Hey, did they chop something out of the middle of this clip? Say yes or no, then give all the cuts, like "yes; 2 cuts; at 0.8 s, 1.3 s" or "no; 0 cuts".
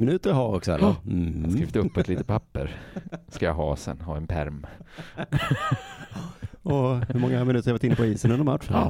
no; 0 cuts